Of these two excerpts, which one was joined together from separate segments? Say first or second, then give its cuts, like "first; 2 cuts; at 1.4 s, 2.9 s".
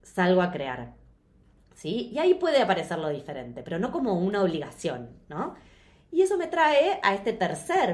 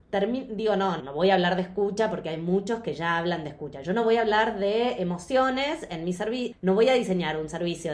second; 2 cuts; at 1.0 s, 6.5 s